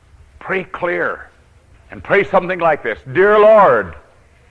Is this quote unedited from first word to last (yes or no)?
no